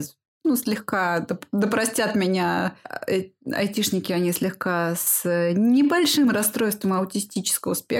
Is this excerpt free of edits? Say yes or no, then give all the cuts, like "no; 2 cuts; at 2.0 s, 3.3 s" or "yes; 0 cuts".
yes; 0 cuts